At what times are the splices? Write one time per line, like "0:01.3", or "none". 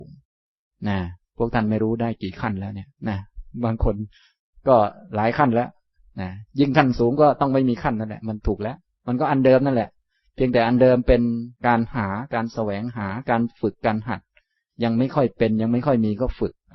0:03.0
0:11.6